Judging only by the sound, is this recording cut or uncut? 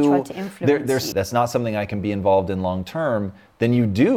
cut